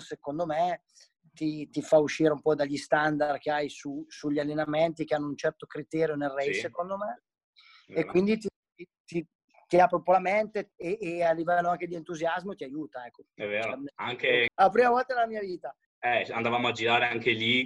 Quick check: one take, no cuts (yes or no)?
no